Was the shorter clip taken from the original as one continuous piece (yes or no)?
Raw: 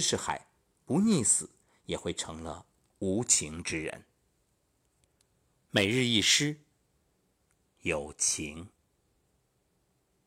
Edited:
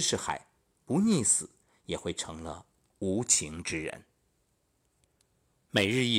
yes